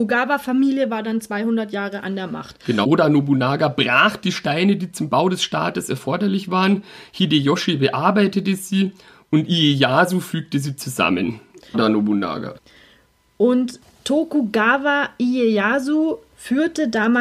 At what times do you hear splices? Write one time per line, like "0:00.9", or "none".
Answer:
0:02.8
0:11.7